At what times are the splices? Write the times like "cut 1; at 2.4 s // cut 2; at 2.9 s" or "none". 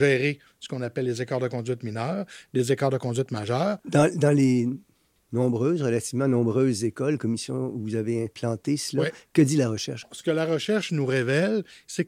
none